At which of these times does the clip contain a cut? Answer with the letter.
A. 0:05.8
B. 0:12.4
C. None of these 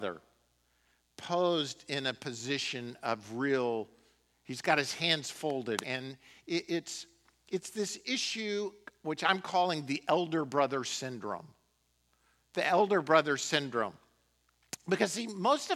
A